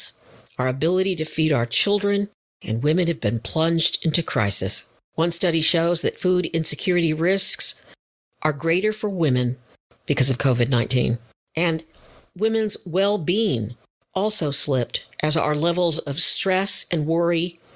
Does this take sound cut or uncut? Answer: uncut